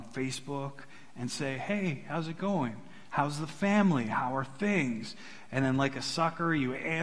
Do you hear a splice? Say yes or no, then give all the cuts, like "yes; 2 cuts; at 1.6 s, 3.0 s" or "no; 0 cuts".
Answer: no; 0 cuts